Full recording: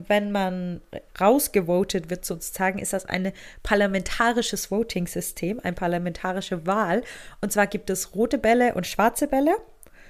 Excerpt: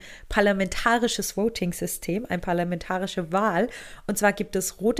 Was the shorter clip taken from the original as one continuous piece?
yes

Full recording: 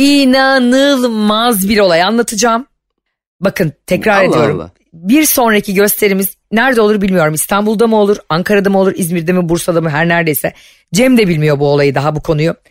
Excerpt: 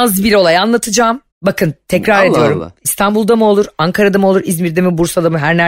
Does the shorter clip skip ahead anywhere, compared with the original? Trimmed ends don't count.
yes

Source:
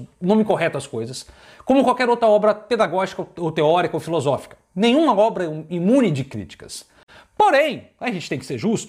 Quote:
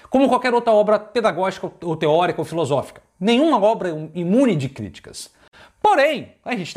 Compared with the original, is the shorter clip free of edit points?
yes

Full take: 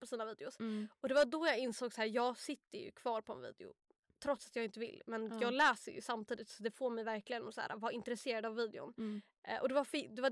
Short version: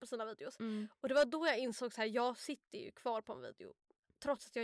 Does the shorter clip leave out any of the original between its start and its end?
no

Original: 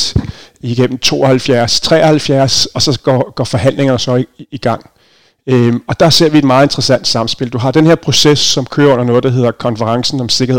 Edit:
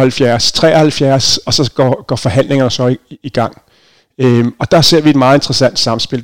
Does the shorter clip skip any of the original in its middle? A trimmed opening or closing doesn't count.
no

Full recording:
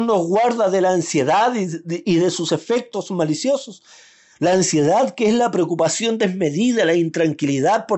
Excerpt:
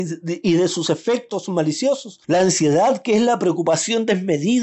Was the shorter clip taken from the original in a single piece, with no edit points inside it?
no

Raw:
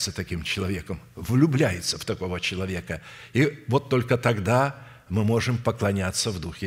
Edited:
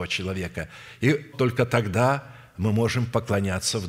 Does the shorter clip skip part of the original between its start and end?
yes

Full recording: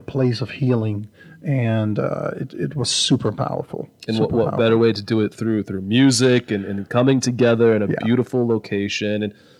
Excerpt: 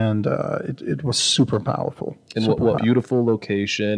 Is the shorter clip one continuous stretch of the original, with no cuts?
no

